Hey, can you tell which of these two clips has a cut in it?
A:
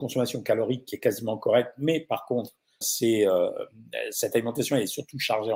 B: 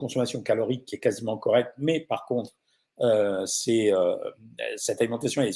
A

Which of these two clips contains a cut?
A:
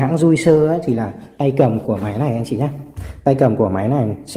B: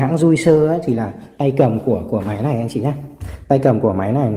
A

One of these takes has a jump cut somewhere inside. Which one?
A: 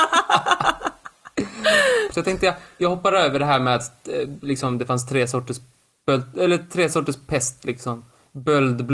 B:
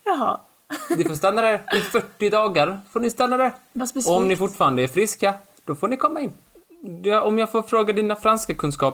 A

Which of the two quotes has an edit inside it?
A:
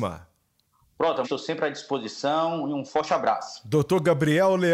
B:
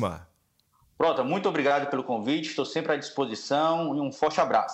A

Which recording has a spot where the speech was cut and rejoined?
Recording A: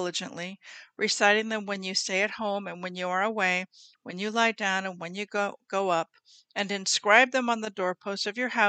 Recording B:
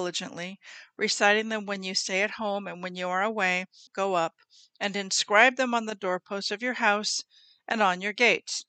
B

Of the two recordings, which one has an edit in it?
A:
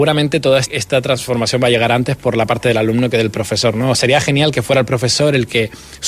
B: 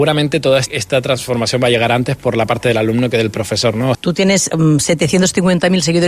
B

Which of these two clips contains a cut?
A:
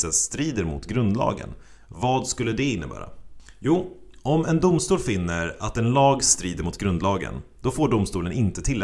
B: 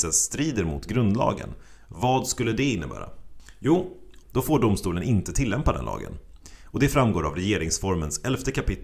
B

